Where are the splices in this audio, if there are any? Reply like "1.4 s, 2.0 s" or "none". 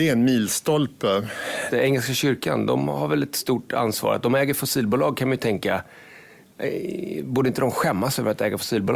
1.7 s